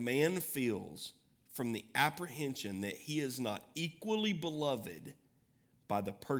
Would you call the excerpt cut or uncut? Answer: uncut